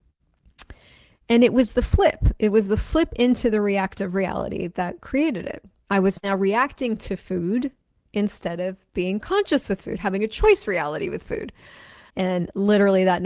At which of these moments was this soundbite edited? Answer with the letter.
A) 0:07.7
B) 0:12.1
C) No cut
B